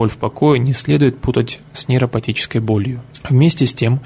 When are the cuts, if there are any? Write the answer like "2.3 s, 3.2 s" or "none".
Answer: none

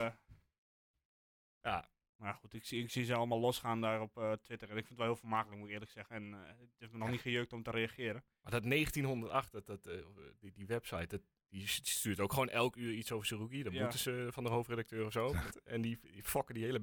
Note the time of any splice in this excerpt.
15.5 s

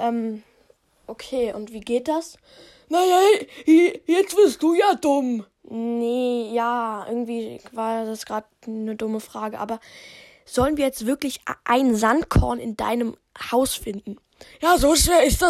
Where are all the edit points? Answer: none

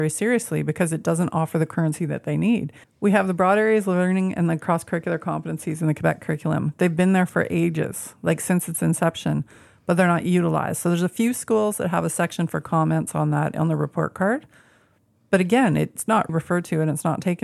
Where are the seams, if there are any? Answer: 2.8 s, 16.3 s

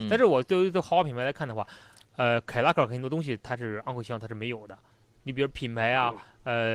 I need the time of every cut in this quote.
none

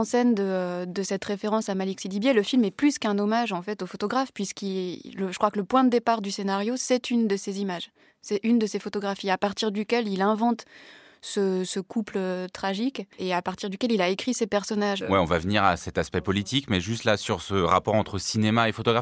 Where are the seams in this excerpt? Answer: 13.1 s, 15.0 s

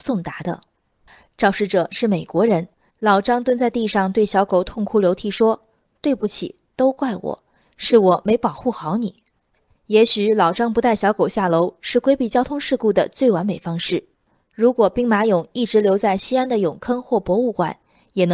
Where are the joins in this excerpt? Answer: 2.9 s

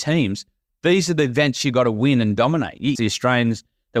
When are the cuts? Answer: 3.0 s

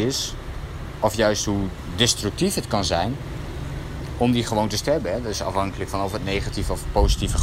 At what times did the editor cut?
none

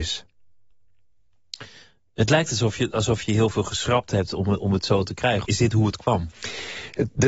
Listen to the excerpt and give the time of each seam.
5.5 s

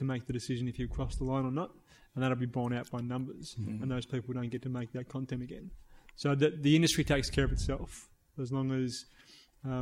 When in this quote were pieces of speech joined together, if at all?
none

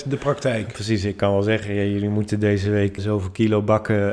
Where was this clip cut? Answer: 3.0 s

